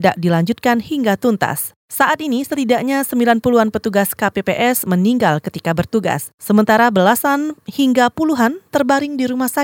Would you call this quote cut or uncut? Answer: uncut